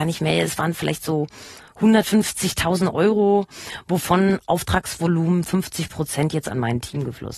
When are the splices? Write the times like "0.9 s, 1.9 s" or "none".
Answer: none